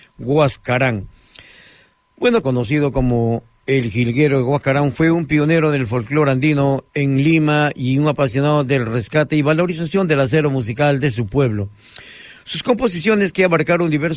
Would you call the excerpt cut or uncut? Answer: cut